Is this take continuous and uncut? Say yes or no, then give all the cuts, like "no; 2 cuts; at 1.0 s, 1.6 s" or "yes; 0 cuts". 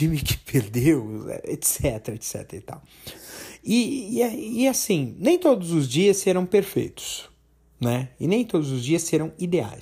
yes; 0 cuts